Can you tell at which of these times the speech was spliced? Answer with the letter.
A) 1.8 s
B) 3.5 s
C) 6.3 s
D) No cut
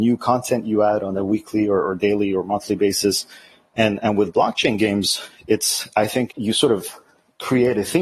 C